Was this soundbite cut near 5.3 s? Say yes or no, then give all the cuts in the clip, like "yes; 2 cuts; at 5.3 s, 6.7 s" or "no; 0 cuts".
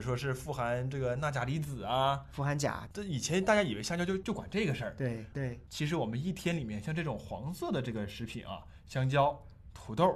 yes; 1 cut; at 5.3 s